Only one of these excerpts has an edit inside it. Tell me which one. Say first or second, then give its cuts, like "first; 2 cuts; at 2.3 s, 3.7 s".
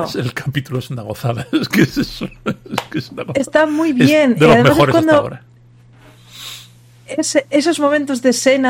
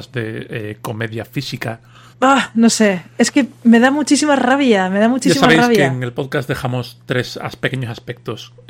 second; 1 cut; at 2.1 s